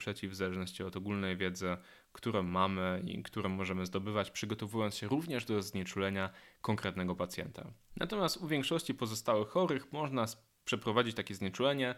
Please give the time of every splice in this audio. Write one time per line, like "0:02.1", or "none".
0:07.9